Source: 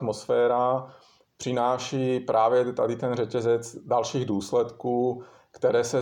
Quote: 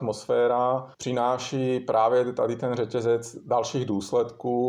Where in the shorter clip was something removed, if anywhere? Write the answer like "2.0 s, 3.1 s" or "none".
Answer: 0.9 s